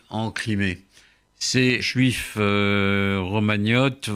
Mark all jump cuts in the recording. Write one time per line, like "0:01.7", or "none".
0:01.8